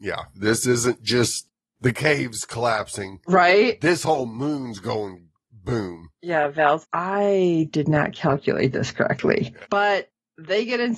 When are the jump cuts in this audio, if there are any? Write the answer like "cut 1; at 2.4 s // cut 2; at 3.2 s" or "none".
cut 1; at 6.8 s // cut 2; at 9.6 s